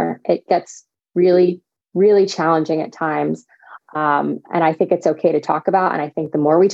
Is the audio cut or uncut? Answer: cut